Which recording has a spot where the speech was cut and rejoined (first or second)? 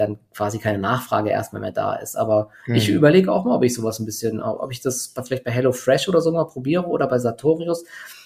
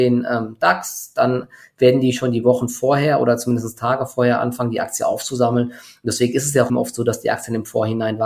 second